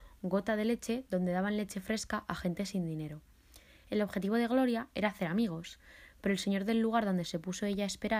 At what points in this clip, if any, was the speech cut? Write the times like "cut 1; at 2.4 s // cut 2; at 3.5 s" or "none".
none